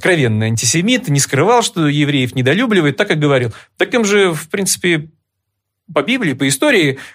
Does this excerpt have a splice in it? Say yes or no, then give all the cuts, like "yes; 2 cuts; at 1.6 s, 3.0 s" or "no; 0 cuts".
no; 0 cuts